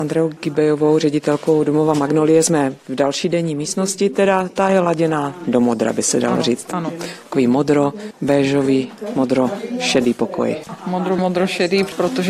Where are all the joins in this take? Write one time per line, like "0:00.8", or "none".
0:11.2